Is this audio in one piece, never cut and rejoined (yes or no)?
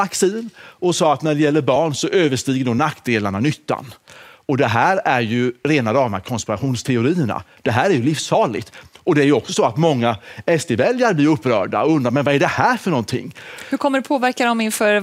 yes